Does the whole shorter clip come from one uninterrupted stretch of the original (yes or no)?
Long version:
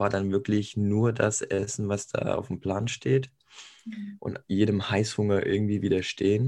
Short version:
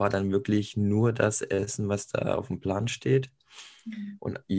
yes